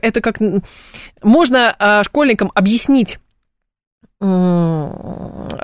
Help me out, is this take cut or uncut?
cut